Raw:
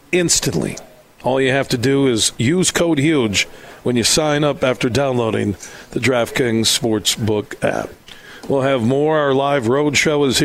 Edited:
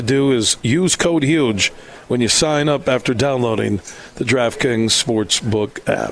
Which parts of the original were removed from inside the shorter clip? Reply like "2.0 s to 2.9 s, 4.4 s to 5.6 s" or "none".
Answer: none